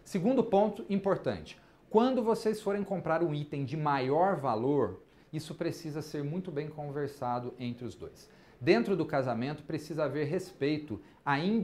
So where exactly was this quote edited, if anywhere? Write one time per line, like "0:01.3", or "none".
none